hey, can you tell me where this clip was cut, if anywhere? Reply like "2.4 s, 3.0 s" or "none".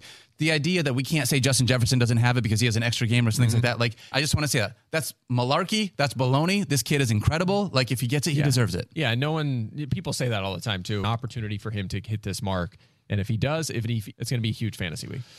4.1 s, 11.0 s, 14.1 s